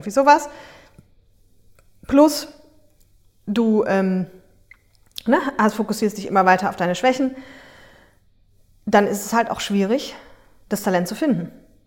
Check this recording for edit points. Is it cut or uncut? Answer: uncut